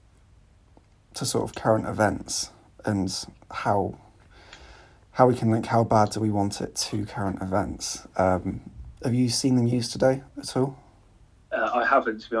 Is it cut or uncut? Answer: uncut